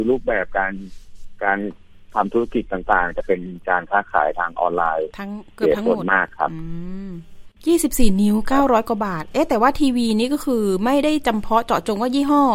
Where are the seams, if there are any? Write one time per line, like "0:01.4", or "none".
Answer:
0:07.6